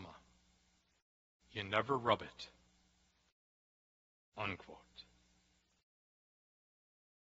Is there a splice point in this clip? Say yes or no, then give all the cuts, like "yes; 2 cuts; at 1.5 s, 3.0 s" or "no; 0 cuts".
no; 0 cuts